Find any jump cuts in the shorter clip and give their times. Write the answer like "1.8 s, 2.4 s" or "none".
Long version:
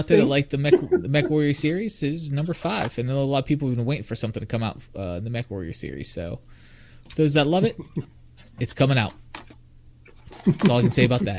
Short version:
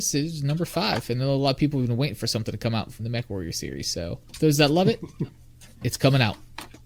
3.0 s, 4.3 s